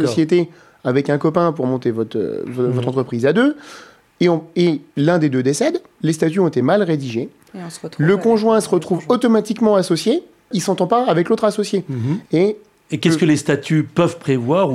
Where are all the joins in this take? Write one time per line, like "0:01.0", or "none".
0:10.5
0:12.3